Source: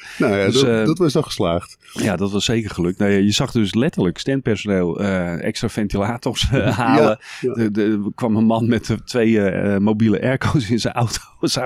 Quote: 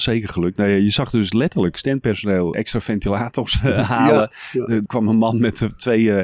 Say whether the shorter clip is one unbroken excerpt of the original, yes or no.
no